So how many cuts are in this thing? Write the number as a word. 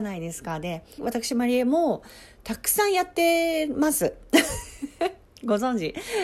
one